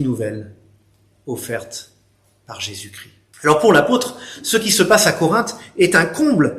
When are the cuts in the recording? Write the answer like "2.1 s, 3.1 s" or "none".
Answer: 3.3 s